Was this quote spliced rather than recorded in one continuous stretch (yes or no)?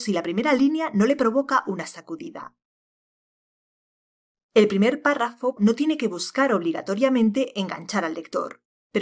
yes